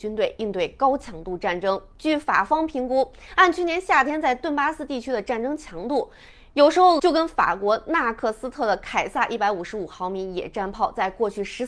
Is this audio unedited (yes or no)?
no